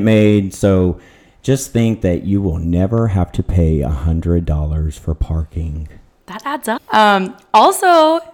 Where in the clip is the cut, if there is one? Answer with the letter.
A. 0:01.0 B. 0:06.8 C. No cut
B